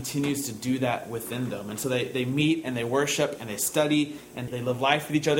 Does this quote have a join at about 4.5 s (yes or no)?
yes